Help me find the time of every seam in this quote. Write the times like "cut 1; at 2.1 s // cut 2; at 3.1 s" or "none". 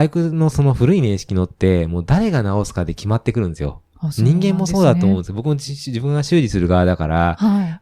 none